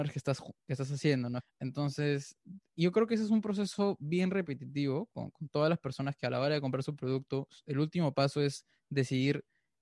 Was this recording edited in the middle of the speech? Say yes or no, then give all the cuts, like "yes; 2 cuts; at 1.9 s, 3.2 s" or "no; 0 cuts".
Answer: yes; 1 cut; at 1.4 s